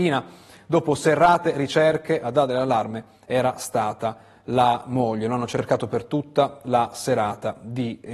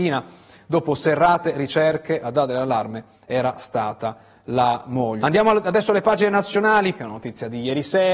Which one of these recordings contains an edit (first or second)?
second